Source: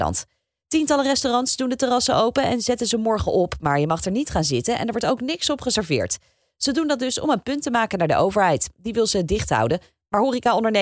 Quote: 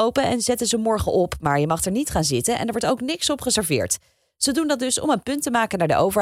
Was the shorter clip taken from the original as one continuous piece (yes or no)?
yes